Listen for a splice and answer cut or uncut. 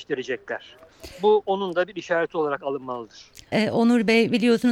cut